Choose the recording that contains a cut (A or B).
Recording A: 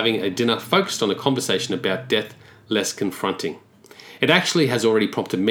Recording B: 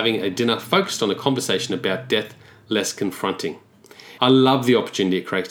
B